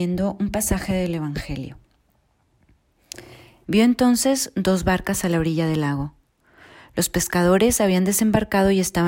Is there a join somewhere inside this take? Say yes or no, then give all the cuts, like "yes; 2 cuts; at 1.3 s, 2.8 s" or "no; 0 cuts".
yes; 1 cut; at 3.6 s